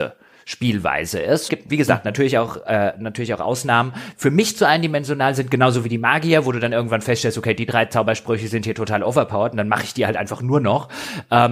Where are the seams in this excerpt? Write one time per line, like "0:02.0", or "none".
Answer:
0:01.5